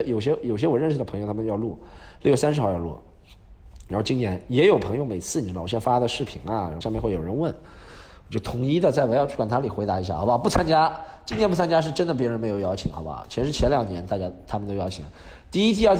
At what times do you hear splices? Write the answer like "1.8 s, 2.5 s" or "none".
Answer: 6.8 s